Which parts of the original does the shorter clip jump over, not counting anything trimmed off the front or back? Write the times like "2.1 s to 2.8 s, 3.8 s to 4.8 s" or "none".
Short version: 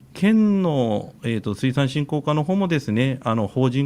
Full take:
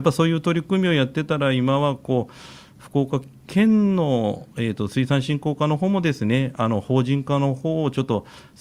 none